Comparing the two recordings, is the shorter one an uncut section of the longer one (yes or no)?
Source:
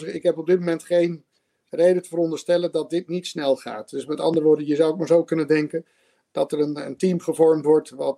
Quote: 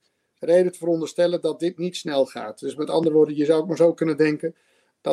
yes